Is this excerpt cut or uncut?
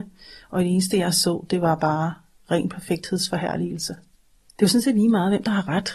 uncut